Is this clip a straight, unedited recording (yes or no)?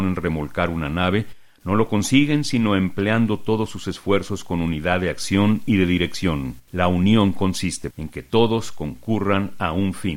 no